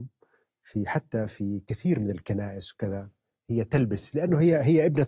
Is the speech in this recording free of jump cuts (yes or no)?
yes